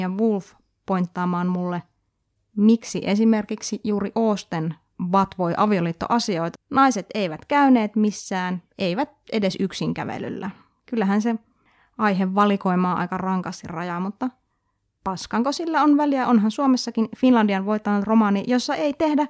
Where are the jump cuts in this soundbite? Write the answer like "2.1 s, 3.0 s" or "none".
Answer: 6.5 s